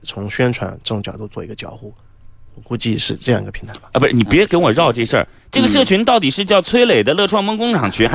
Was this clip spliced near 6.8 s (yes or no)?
no